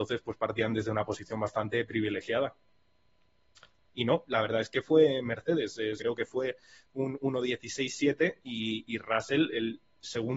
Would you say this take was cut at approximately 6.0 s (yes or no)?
yes